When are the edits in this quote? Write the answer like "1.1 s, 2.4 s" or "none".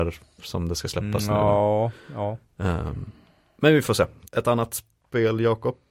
4.3 s